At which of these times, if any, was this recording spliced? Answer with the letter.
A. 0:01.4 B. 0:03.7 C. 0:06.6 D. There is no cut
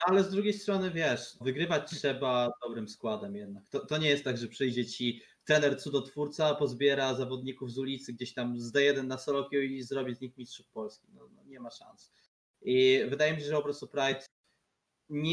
A